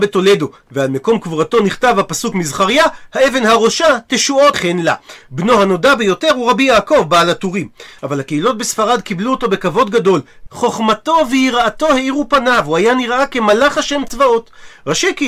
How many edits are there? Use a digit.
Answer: 3